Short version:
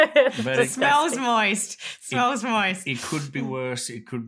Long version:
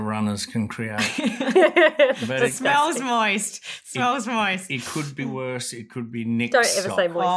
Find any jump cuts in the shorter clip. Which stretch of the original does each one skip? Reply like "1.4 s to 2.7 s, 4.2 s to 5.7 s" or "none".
none